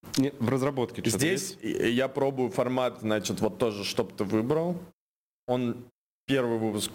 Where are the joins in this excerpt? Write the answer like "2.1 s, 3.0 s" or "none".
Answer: none